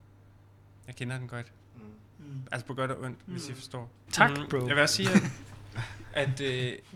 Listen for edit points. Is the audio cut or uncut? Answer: cut